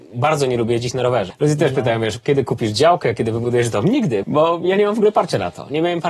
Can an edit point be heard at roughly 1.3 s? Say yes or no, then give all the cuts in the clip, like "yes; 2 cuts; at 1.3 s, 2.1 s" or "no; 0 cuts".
yes; 2 cuts; at 1.3 s, 4.2 s